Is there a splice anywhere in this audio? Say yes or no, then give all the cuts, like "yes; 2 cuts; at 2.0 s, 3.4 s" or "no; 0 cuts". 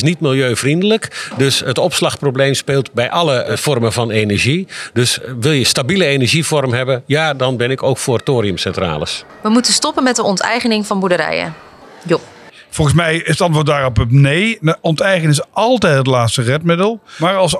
no; 0 cuts